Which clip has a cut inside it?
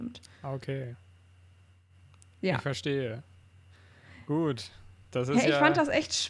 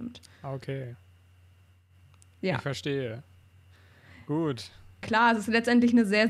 second; 1 cut; at 5.0 s

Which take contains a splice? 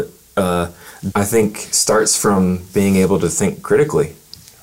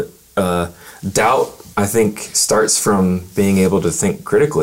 first; 1 cut; at 1.1 s

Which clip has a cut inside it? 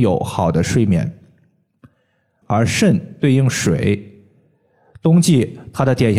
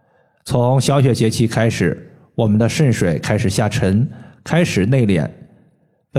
first; 1 cut; at 2.4 s

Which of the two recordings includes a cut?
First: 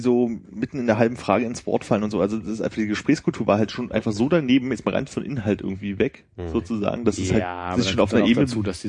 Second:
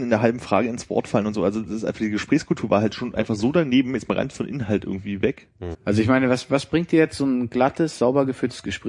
second; 1 cut; at 5.7 s

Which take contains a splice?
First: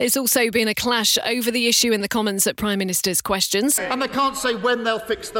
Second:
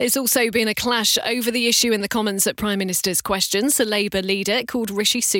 first; 1 cut; at 3.8 s

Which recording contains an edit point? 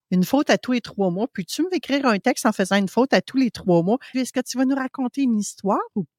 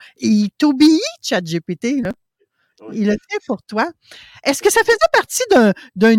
first; 1 cut; at 4.1 s

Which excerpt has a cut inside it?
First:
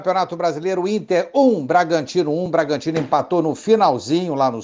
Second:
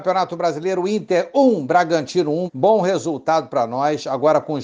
second; 1 cut; at 2.5 s

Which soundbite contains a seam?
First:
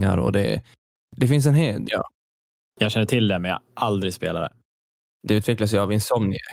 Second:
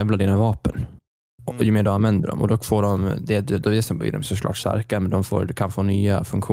first; 1 cut; at 1.9 s

